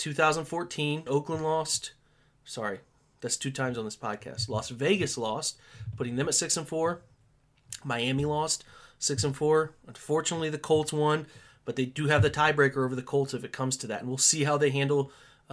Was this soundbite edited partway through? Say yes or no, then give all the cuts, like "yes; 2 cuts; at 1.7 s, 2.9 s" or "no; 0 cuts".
yes; 1 cut; at 1.1 s